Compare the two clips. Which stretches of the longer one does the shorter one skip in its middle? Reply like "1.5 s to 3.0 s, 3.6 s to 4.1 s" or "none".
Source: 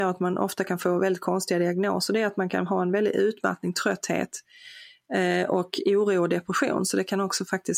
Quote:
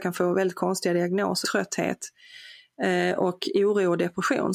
2.1 s to 3.7 s